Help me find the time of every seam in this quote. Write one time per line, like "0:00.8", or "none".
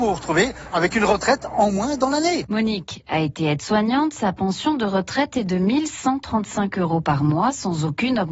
none